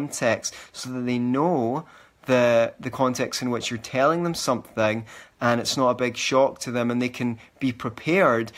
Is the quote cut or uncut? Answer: uncut